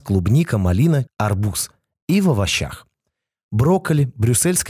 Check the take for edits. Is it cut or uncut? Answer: cut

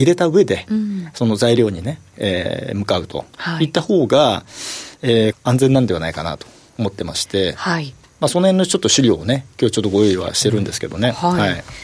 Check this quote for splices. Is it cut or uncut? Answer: cut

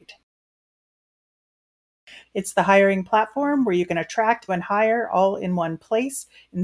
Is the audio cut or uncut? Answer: cut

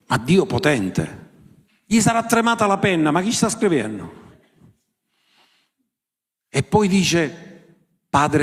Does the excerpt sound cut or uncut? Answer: cut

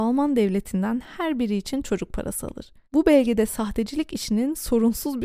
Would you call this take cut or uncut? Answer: cut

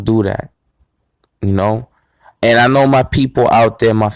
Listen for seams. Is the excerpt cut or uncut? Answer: uncut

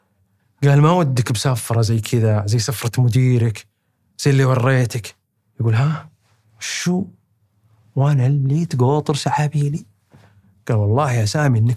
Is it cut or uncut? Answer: uncut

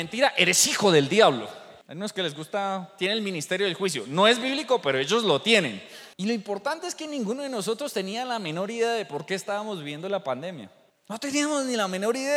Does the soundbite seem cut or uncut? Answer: cut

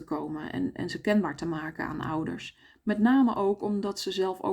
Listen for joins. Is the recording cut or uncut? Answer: uncut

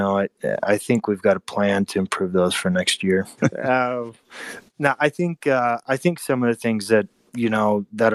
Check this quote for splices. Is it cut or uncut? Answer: cut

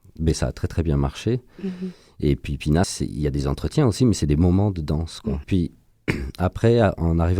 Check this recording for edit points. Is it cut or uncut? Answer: cut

